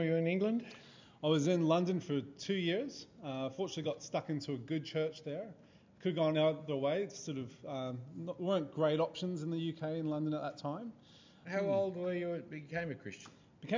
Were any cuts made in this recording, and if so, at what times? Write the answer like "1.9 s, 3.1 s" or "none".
11.4 s